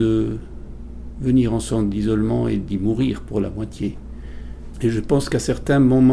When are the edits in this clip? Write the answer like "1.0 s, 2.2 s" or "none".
4.7 s